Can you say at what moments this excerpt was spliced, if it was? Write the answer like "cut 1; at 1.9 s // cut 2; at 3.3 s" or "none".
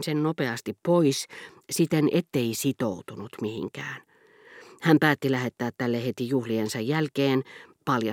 none